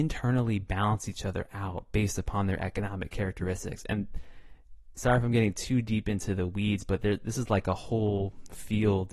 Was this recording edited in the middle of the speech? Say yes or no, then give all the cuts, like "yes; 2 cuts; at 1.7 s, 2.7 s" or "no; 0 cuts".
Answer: no; 0 cuts